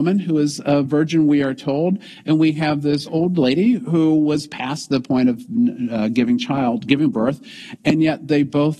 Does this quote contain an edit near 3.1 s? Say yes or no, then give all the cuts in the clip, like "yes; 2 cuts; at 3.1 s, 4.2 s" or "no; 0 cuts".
yes; 1 cut; at 3.1 s